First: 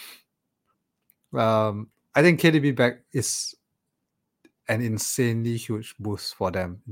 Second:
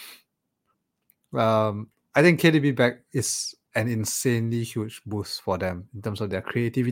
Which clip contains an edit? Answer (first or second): second